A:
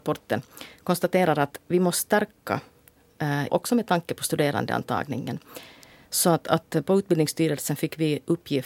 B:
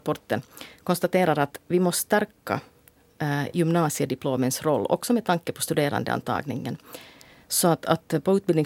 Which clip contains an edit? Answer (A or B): A